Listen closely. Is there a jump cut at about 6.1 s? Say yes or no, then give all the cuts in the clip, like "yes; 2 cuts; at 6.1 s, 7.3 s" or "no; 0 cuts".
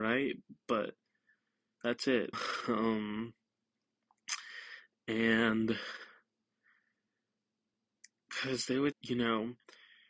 no; 2 cuts; at 2.3 s, 8.9 s